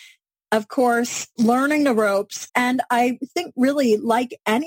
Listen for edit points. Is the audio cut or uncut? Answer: cut